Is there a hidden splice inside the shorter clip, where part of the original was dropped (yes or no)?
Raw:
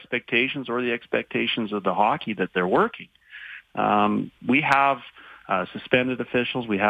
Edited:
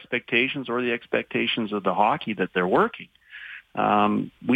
no